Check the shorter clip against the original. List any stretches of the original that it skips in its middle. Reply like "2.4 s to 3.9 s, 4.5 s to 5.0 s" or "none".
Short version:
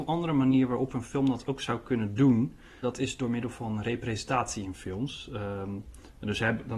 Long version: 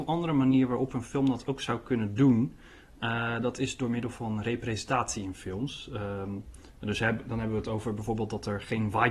2.8 s to 3.4 s